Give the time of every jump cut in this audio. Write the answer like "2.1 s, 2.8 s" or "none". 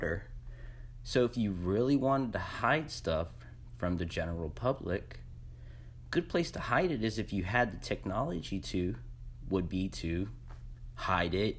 1.0 s